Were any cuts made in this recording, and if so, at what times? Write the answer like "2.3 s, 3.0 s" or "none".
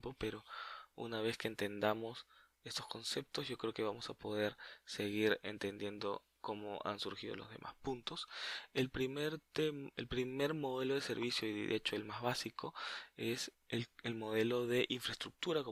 13.5 s